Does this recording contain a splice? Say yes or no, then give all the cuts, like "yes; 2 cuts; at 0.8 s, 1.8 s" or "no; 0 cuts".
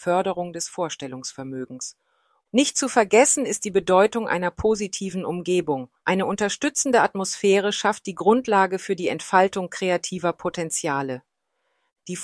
yes; 2 cuts; at 2.4 s, 6.0 s